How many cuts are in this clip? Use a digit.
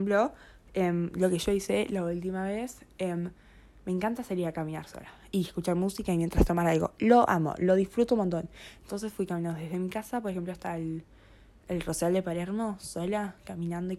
0